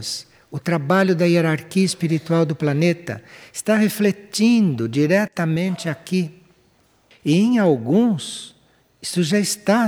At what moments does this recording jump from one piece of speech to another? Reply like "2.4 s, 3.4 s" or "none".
7.1 s